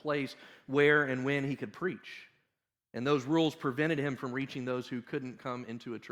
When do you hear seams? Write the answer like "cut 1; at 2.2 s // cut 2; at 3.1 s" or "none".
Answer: none